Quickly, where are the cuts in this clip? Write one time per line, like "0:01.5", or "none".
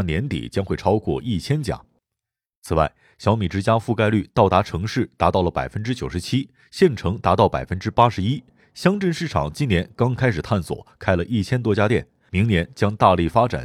none